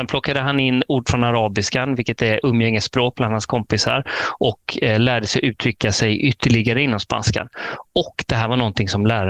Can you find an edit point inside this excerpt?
no; 0 cuts

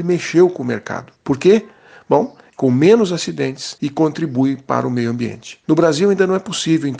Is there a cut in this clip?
yes; 2 cuts; at 1.1 s, 2.5 s

